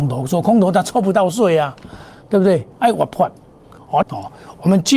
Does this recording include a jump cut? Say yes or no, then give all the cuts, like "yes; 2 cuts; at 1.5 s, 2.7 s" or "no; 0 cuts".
yes; 2 cuts; at 2.7 s, 4.0 s